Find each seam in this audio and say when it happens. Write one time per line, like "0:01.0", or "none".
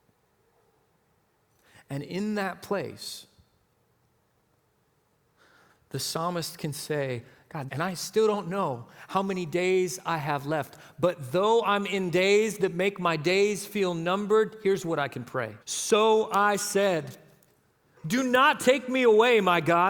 0:07.7
0:15.6